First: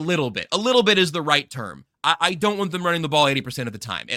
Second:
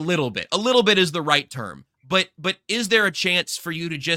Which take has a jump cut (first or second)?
second